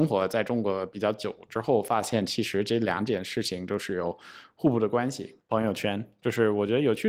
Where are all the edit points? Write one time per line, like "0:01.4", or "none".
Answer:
0:05.4